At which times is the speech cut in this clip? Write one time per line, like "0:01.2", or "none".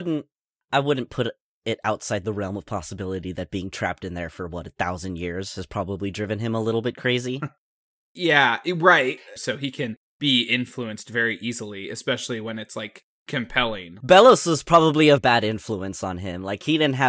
0:09.4
0:14.0
0:15.2

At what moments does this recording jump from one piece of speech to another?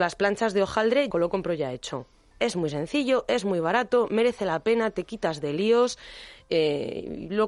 0:01.1

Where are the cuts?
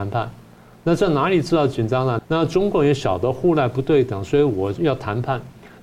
0:02.2
0:04.7

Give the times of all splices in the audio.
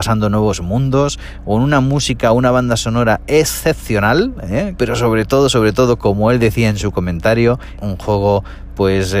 0:04.8
0:07.8

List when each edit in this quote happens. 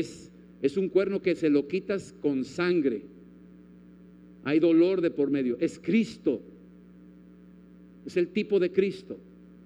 none

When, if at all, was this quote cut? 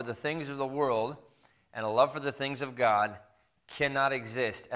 none

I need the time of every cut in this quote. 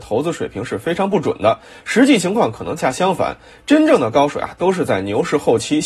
0:02.8

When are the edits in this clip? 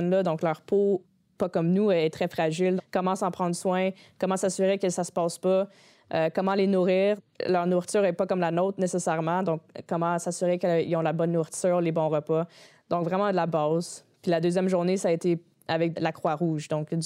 0:02.8

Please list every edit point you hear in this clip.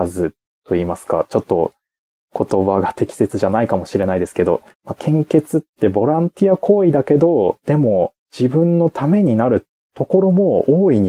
0:04.7
0:08.2

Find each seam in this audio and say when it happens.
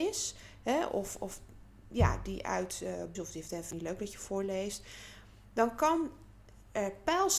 0:03.1

